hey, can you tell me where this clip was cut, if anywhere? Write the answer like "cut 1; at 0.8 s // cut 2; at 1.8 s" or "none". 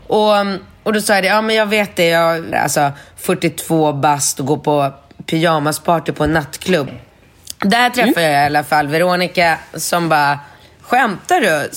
cut 1; at 2.5 s // cut 2; at 6.9 s